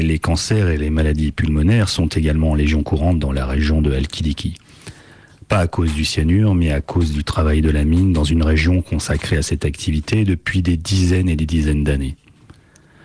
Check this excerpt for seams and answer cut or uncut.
uncut